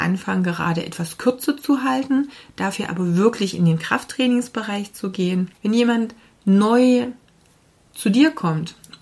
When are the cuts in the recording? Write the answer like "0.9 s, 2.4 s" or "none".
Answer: 5.5 s

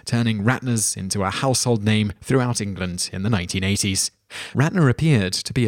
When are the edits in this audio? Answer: 4.5 s

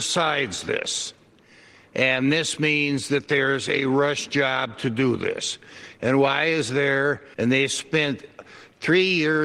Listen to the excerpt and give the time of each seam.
7.3 s

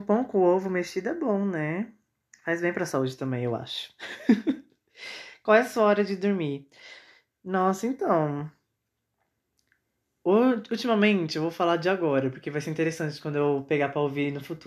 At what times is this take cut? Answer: none

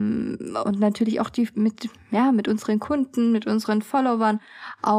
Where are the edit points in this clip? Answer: 1.5 s

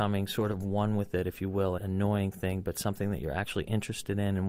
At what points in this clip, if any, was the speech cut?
1.8 s

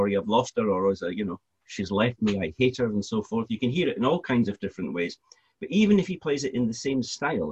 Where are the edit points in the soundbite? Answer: none

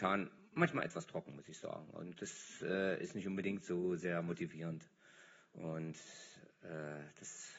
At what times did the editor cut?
none

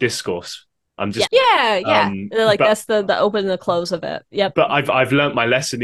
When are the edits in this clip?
1.3 s

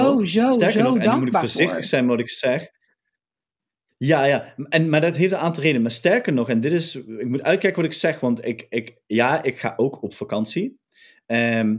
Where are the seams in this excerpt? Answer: none

